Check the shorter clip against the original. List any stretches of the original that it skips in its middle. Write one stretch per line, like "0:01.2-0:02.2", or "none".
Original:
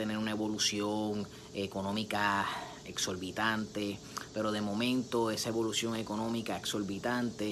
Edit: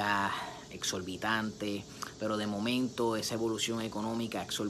none